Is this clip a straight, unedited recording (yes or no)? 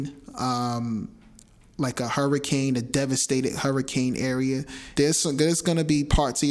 no